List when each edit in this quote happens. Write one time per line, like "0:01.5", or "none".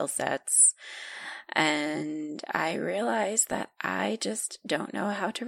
none